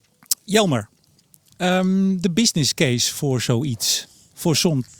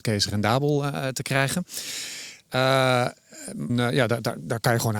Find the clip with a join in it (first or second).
second